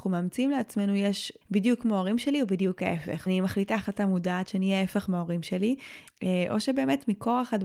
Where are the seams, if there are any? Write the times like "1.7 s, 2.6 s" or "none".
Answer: 1.4 s, 3.3 s, 6.1 s

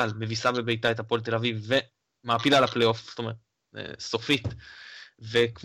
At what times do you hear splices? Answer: none

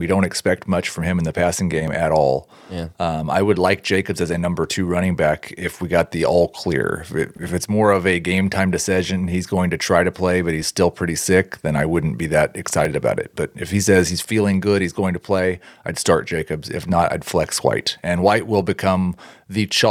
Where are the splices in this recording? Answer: none

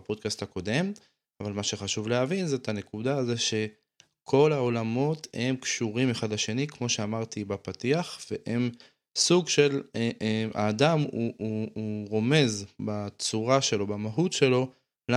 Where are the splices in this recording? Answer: none

